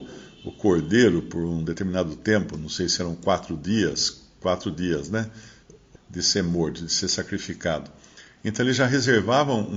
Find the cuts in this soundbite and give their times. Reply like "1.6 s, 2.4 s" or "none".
6.0 s, 8.4 s